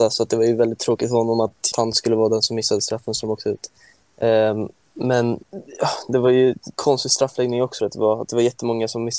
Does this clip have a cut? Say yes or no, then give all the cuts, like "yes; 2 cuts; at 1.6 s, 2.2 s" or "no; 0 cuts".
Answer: yes; 3 cuts; at 1.7 s, 5.4 s, 7.8 s